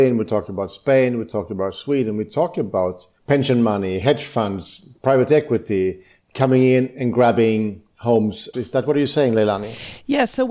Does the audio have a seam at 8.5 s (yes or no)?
yes